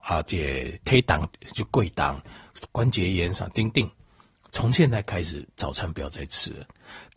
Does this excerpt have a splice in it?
yes; 1 cut; at 2.7 s

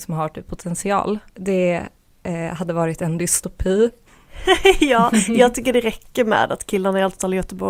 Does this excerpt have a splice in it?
yes; 1 cut; at 1.3 s

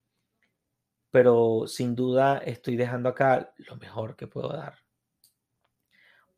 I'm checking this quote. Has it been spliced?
no; 0 cuts

